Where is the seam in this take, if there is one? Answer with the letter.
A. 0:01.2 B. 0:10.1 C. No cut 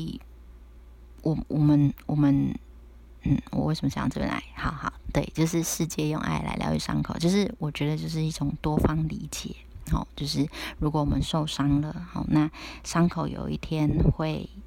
C